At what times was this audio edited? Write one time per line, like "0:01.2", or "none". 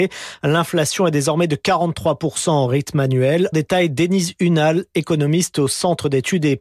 0:03.5

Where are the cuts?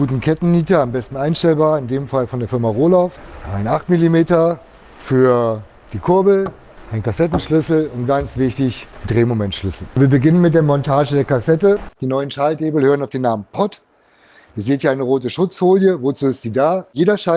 0:11.9

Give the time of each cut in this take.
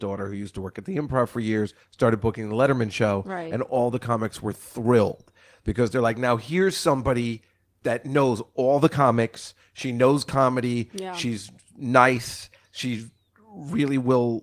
none

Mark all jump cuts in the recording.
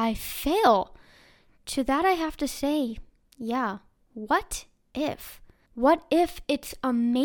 0:05.7

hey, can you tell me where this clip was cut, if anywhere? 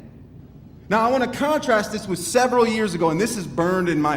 none

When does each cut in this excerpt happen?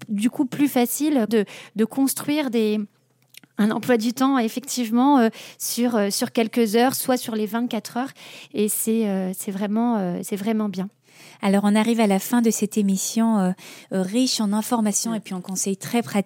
0:01.3

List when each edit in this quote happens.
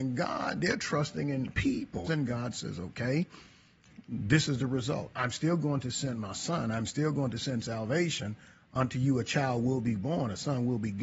0:02.1

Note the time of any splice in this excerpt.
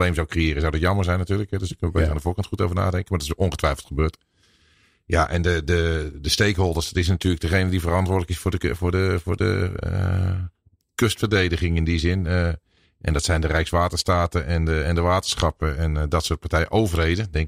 none

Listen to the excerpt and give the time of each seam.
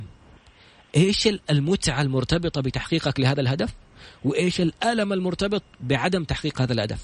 none

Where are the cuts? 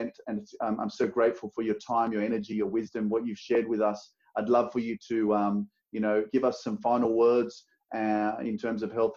none

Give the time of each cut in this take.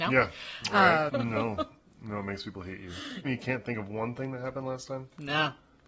0:01.1
0:03.2

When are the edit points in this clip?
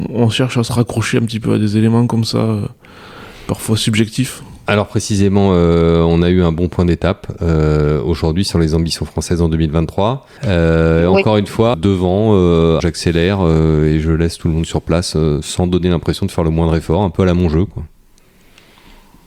0:10.4
0:11.7
0:12.8

